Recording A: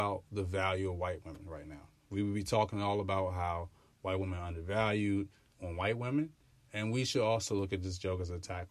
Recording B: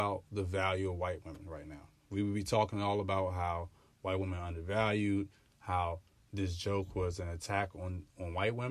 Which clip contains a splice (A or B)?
A